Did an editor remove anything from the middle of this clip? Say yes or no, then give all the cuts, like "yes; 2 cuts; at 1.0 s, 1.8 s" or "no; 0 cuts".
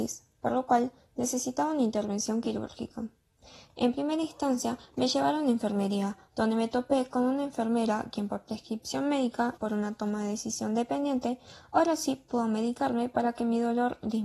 yes; 2 cuts; at 3.7 s, 9.6 s